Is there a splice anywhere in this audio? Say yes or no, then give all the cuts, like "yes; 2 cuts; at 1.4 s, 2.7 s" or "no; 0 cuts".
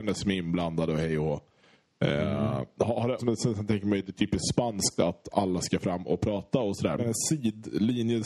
yes; 2 cuts; at 3.2 s, 7.0 s